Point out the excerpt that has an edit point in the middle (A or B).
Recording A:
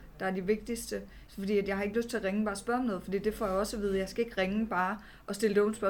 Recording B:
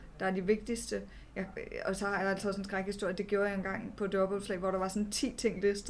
A